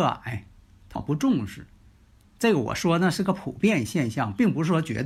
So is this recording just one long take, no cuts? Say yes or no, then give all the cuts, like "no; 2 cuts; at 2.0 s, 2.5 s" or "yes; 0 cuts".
no; 1 cut; at 1.0 s